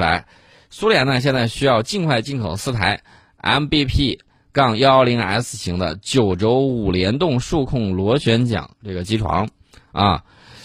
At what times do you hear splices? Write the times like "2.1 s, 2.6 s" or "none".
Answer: none